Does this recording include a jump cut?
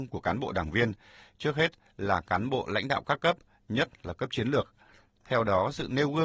no; 0 cuts

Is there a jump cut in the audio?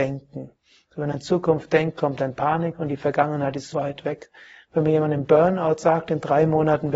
yes; 1 cut; at 3.7 s

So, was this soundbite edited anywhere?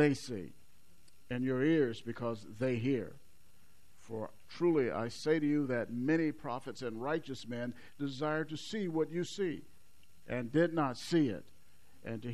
no; 0 cuts

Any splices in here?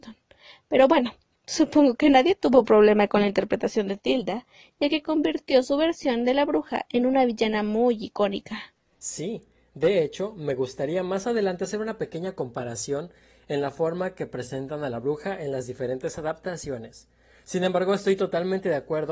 no; 0 cuts

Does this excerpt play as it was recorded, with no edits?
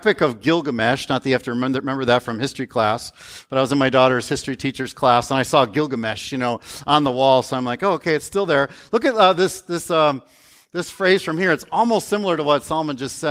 yes; 0 cuts

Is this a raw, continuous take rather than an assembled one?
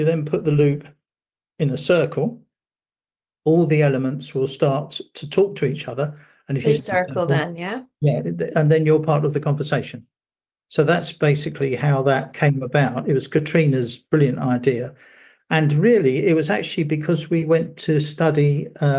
no; 1 cut; at 6.8 s

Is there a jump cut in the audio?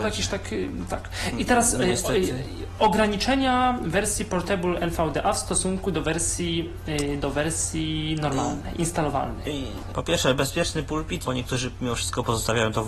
yes; 2 cuts; at 9.9 s, 11.2 s

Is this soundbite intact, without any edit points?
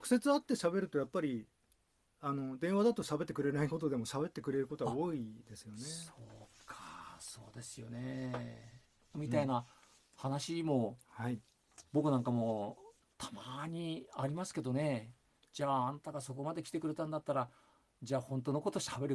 no; 1 cut; at 9.1 s

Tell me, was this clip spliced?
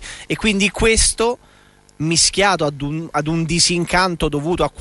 no; 0 cuts

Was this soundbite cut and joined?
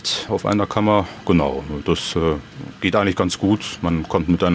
no; 0 cuts

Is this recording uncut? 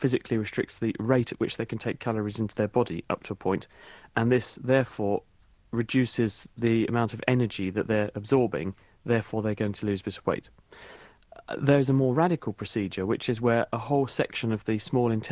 yes; 0 cuts

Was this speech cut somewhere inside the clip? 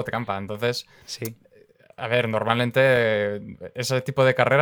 no; 0 cuts

